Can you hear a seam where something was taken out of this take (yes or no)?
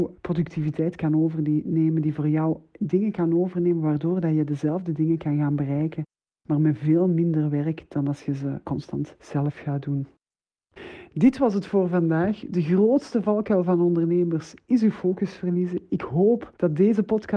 no